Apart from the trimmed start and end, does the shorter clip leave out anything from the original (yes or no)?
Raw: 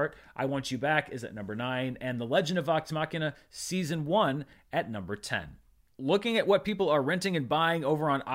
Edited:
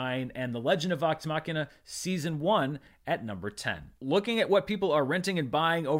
yes